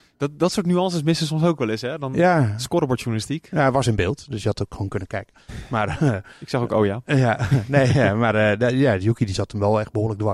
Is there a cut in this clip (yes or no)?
no